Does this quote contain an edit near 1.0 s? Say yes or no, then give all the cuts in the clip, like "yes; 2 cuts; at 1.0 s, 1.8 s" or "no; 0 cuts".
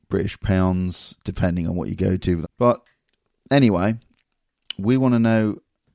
no; 1 cut; at 2.4 s